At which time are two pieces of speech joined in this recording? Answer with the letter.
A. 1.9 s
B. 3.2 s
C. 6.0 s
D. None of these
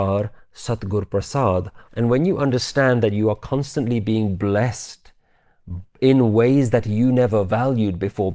A